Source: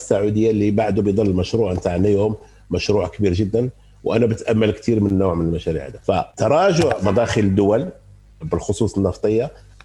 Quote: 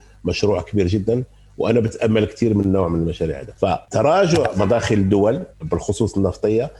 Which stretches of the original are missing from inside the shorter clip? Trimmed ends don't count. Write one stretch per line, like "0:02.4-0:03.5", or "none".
0:08.0-0:08.3